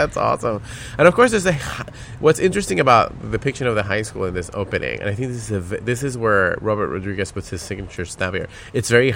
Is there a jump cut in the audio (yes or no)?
no